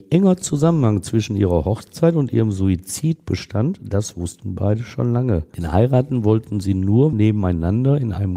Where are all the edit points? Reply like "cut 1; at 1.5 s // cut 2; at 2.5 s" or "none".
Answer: cut 1; at 7.1 s